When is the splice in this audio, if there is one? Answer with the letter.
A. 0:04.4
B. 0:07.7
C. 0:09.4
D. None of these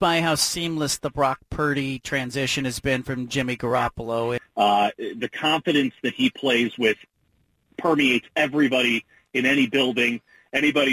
A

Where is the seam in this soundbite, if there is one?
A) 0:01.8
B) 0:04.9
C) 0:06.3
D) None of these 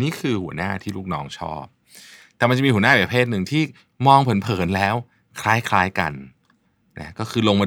D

